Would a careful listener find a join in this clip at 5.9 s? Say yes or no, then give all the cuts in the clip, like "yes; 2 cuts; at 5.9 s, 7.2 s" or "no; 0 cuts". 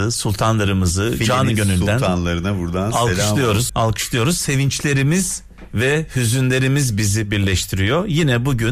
no; 1 cut; at 3.7 s